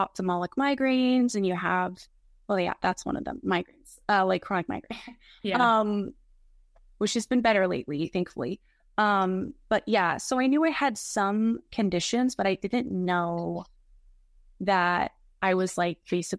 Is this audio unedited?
yes; 0 cuts

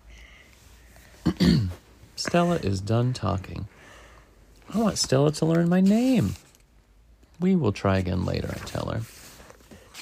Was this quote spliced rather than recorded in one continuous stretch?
no; 0 cuts

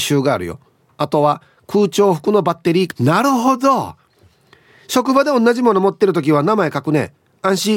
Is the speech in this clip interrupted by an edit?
yes; 1 cut; at 2.9 s

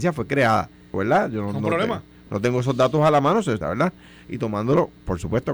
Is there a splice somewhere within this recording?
yes; 2 cuts; at 0.9 s, 3.6 s

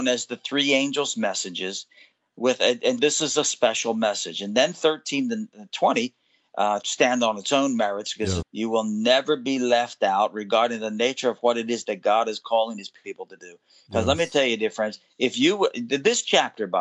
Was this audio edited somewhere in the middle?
yes; 3 cuts; at 3.0 s, 6.8 s, 8.4 s

